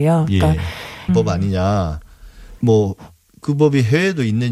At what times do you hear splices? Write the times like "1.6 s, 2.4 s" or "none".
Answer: 1.1 s, 2.6 s

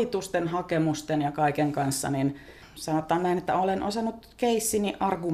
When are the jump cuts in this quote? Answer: none

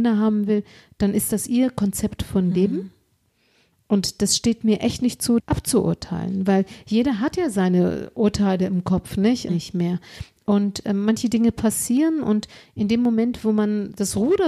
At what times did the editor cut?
5.4 s, 9.5 s

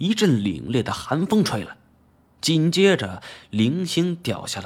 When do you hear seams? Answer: 2.3 s

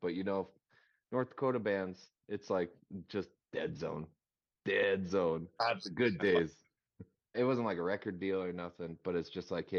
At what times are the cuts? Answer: 5.6 s, 7.3 s

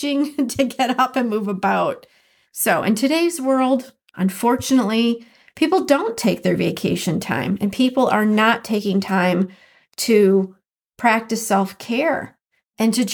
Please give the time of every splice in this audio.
2.4 s

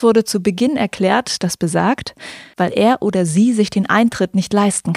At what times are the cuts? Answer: 1.4 s, 2.5 s

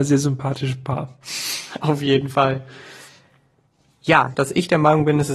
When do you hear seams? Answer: 4.3 s

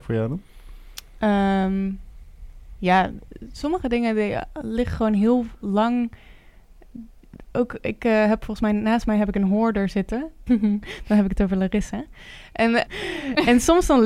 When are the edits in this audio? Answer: 10.5 s, 12.9 s

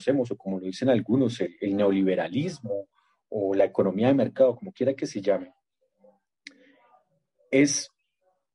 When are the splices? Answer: none

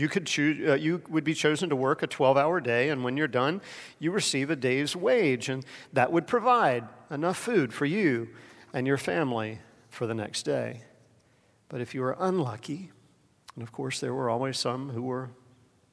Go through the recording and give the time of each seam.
none

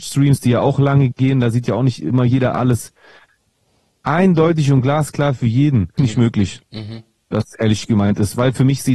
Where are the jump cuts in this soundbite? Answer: 6.0 s

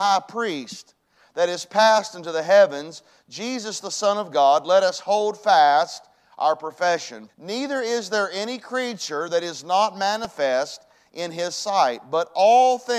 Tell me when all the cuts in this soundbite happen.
7.3 s

